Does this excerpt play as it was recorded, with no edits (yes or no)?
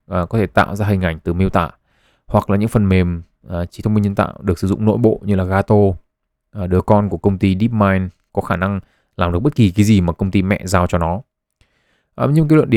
yes